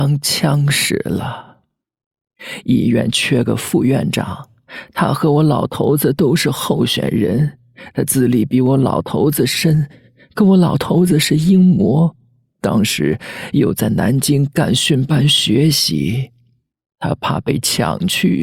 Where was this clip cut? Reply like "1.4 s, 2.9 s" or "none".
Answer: none